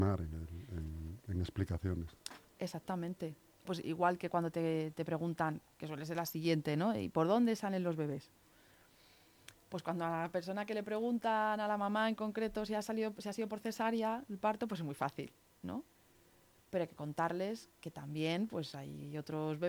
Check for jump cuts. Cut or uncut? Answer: cut